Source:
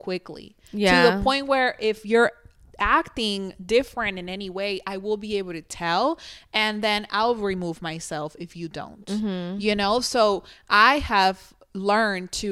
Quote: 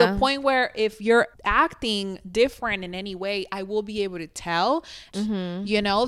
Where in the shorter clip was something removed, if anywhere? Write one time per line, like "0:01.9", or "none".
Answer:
0:01.3
0:05.1